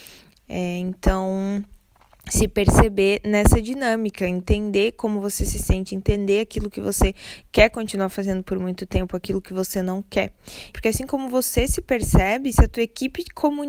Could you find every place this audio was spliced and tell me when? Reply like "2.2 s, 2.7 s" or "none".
10.7 s, 12.5 s